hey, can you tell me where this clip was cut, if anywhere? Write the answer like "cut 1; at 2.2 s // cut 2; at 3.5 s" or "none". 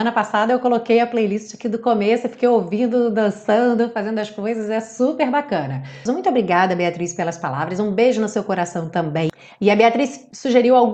cut 1; at 6.1 s

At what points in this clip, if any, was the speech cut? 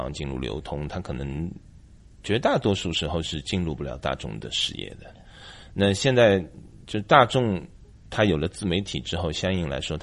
none

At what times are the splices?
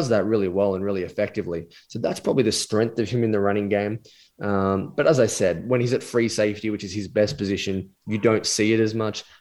none

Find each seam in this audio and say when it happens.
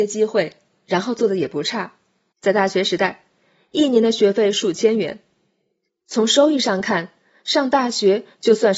cut 1; at 2.3 s // cut 2; at 5.9 s

